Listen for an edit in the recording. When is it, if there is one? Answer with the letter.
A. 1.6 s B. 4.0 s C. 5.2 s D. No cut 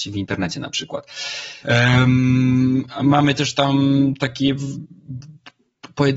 A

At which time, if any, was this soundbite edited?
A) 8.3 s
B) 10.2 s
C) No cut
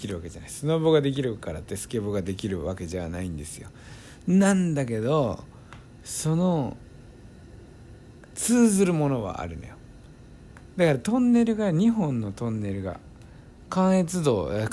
A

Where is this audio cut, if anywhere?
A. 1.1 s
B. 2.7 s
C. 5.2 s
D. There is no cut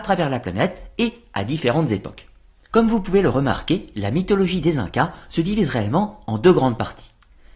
B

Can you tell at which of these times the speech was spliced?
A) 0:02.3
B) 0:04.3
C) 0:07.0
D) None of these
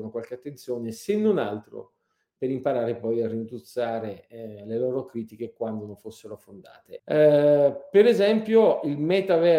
C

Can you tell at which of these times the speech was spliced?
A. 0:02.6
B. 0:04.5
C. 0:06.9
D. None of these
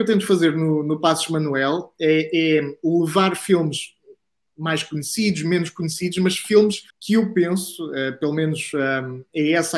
C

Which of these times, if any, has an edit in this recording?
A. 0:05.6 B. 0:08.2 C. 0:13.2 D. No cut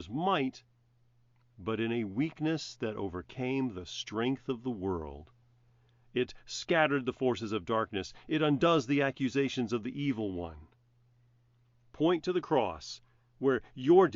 D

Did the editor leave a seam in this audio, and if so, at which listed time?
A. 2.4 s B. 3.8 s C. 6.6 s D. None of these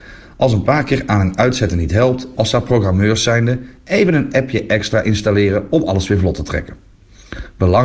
A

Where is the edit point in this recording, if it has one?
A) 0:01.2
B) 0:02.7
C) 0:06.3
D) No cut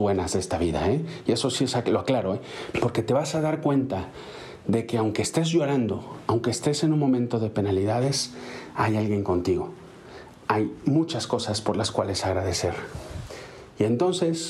B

